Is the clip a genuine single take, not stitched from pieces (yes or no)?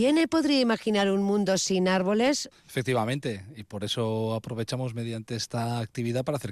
no